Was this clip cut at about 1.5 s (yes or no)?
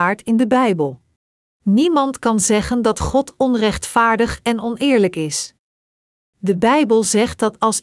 yes